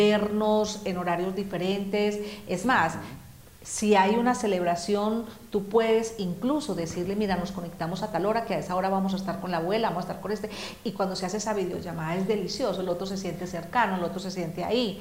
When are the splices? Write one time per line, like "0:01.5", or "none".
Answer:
none